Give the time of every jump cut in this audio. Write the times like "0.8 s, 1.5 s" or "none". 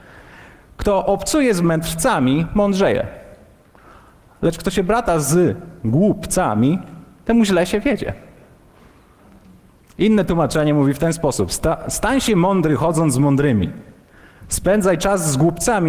none